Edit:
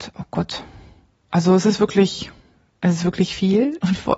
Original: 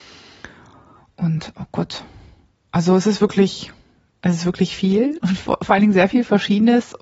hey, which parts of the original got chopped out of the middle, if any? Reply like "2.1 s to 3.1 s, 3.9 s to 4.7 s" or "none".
none